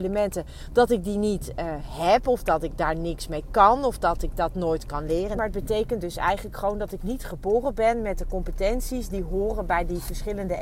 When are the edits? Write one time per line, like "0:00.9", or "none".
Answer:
0:05.4